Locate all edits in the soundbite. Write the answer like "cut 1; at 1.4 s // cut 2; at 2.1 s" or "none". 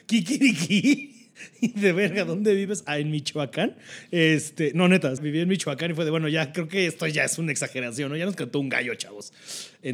cut 1; at 5.2 s